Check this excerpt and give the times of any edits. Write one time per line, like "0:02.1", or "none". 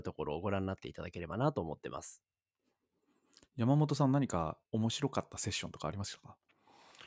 0:04.7